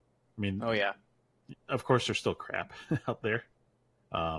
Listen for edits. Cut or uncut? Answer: cut